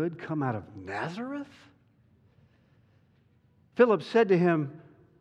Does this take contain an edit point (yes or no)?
no